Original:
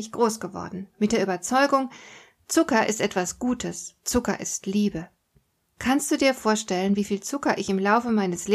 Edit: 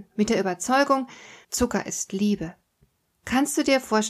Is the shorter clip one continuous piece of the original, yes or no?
no